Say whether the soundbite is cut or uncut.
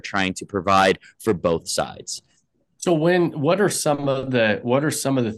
uncut